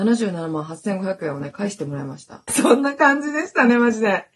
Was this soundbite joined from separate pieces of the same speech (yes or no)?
yes